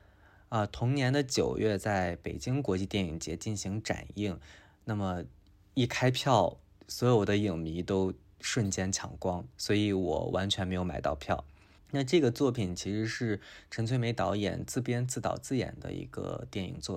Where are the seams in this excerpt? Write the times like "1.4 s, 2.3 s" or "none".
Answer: 11.8 s

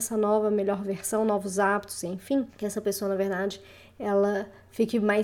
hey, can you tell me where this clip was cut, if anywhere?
2.5 s

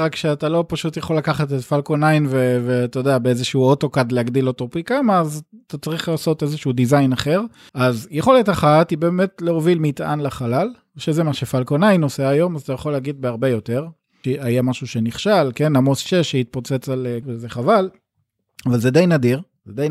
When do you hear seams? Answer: 7.7 s, 14.2 s, 17.2 s

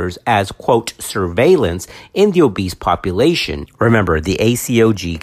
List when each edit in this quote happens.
3.7 s

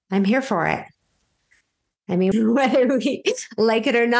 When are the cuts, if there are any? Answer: 2.3 s

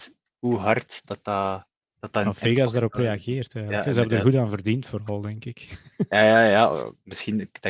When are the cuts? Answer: none

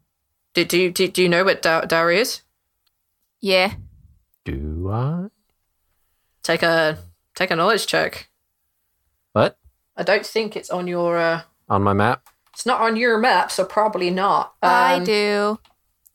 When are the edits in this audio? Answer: 1.6 s

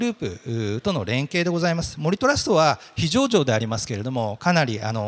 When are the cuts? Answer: none

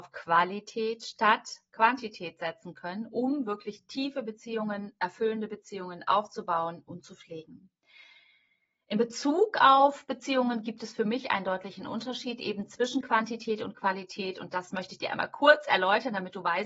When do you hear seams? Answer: none

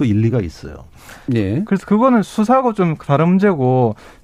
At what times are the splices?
1.3 s

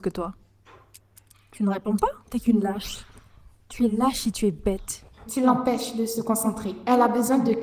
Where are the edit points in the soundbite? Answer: 2.2 s, 5.2 s

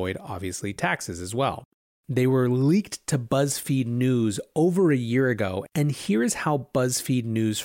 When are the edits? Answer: 2.0 s

